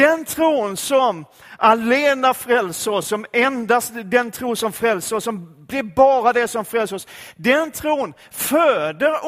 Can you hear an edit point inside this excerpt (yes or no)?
no